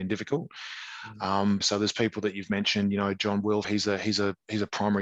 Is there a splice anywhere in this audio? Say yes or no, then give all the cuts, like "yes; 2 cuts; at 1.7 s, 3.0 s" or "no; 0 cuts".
yes; 2 cuts; at 1.6 s, 3.6 s